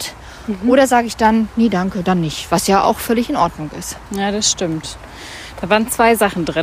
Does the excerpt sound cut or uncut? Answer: uncut